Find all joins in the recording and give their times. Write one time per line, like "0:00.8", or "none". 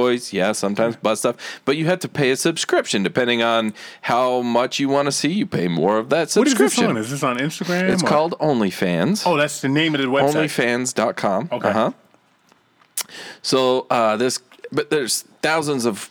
none